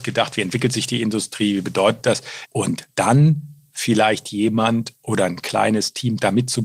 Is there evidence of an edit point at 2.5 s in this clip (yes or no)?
yes